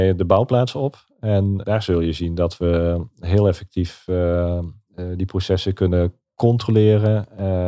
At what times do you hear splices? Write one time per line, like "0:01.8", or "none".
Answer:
0:01.6

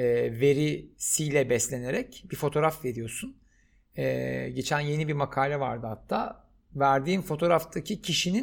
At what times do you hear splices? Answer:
none

